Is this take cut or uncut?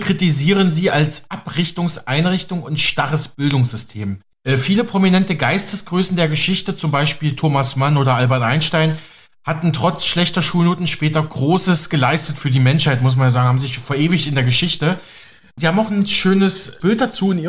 uncut